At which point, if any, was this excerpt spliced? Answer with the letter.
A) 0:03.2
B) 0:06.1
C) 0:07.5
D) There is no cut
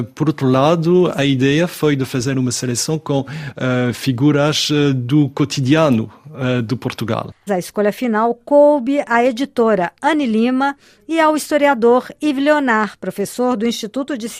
C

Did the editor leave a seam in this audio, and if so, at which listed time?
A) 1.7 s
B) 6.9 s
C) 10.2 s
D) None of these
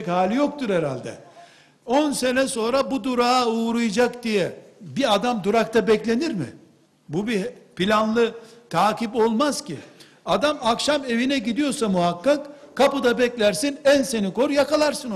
B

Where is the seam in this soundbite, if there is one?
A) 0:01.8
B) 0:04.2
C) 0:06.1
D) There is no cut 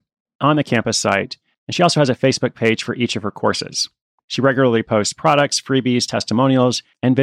D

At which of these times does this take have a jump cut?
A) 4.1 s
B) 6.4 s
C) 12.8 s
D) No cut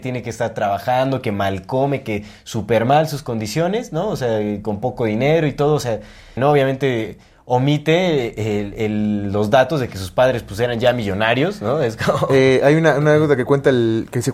B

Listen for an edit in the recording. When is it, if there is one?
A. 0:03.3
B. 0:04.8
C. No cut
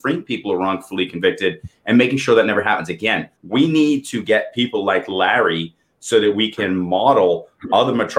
A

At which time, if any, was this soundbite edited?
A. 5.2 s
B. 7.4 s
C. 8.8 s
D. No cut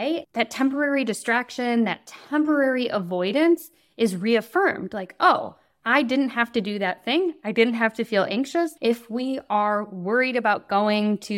C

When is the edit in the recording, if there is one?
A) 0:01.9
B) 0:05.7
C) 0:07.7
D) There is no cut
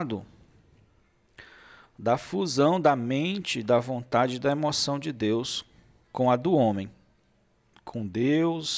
C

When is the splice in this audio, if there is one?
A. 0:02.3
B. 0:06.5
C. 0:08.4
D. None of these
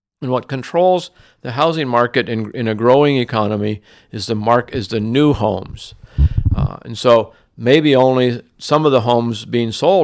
D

